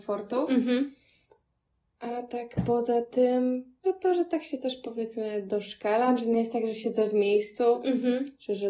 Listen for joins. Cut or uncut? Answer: cut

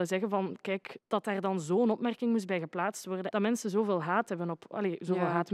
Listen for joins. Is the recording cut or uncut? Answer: cut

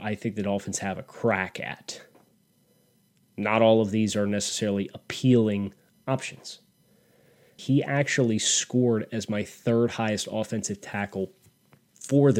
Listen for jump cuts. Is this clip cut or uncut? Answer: cut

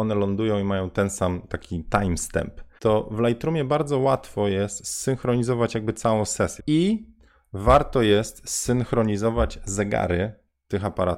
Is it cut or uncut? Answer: cut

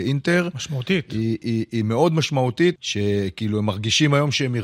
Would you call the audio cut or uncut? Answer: cut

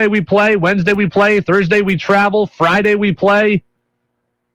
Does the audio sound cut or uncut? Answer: uncut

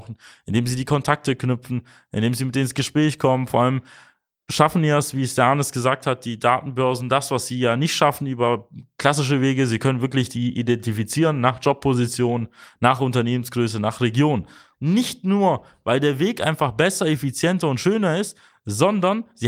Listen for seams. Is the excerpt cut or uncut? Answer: cut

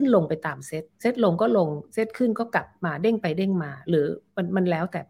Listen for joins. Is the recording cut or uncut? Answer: cut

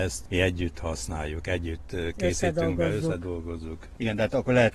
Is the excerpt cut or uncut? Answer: uncut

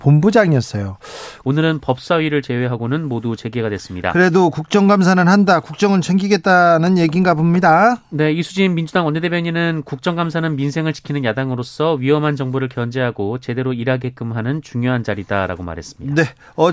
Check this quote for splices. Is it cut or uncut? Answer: cut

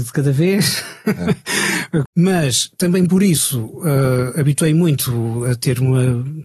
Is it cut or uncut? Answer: cut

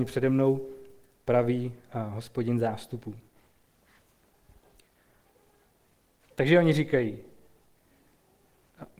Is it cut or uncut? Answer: uncut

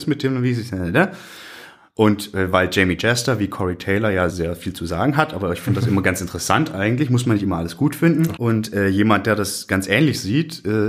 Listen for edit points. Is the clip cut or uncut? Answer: cut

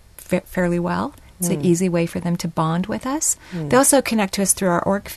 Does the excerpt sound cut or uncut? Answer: uncut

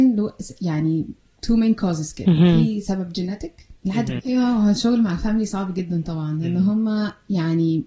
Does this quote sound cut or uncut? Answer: cut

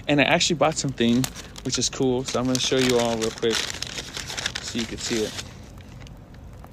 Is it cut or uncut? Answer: uncut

